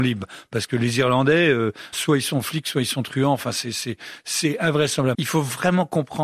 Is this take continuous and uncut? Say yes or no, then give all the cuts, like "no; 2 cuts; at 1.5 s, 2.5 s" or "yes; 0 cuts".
no; 2 cuts; at 1.9 s, 5.1 s